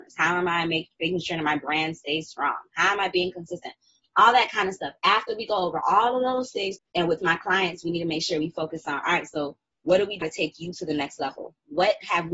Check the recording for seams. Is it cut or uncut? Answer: cut